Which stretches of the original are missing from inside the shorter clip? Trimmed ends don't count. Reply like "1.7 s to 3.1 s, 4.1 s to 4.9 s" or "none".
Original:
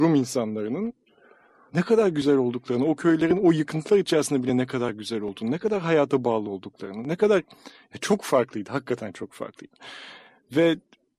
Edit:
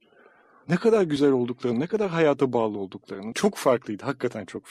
2.8 s to 5.4 s, 7.0 s to 8.0 s